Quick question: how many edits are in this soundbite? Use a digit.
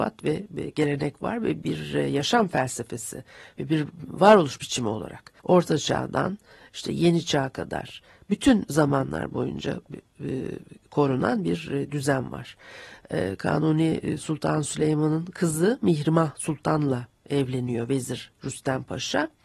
1